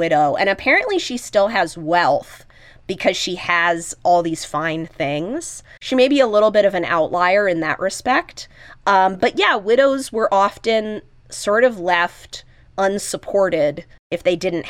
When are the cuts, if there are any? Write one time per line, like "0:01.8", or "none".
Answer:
none